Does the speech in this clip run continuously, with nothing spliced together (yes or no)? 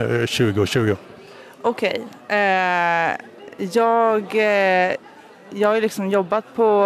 yes